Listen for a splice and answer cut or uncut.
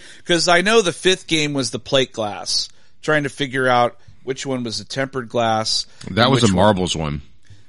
uncut